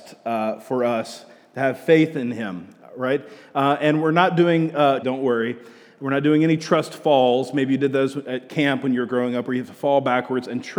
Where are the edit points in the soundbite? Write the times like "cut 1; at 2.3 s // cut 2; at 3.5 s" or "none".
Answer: cut 1; at 5.0 s

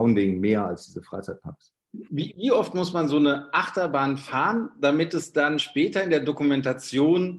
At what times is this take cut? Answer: none

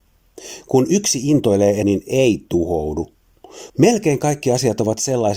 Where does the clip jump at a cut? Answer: cut 1; at 1.8 s // cut 2; at 3.7 s

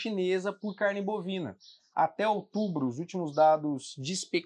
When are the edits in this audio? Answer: none

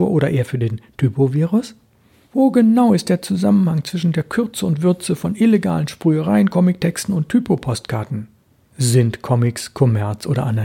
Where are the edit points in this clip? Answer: none

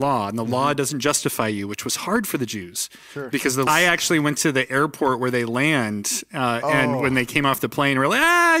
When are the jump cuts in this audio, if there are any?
cut 1; at 3.7 s

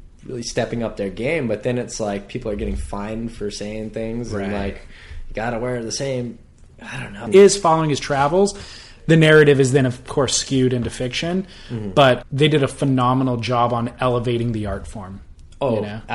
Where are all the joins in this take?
cut 1; at 7.3 s // cut 2; at 12.2 s

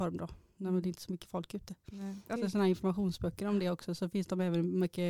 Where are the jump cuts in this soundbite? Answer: cut 1; at 2.4 s

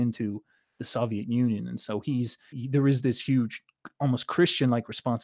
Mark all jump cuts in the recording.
cut 1; at 2.5 s

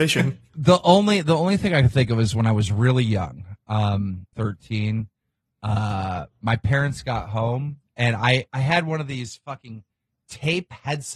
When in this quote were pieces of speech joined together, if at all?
cut 1; at 4.3 s

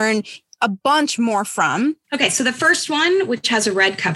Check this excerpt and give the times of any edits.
cut 1; at 2.0 s

